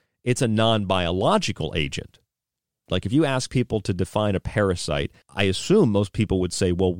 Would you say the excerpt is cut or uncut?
cut